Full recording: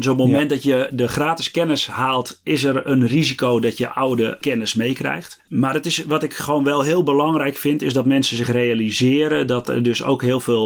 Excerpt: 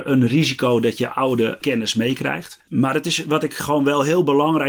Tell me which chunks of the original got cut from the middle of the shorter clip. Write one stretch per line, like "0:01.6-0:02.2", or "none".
none